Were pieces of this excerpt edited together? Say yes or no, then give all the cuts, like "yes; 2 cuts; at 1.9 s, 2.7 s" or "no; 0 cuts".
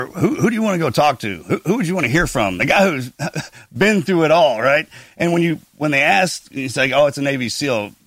no; 0 cuts